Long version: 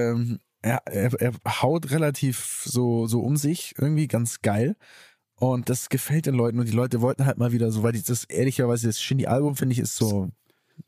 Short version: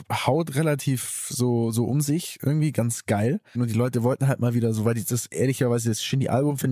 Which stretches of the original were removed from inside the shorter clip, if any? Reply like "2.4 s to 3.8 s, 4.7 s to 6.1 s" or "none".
4.9 s to 6.5 s